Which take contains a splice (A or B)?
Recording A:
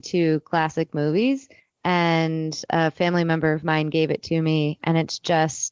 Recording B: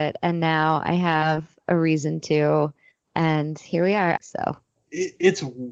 B